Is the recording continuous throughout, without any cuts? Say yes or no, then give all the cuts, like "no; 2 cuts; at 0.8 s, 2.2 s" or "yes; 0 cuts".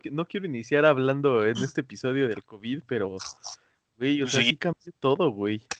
yes; 0 cuts